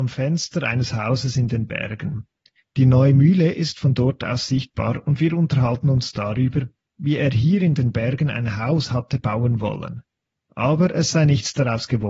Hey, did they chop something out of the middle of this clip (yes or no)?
no